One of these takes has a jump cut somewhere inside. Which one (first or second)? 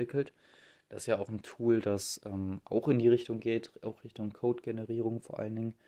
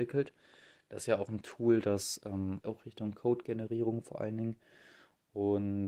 second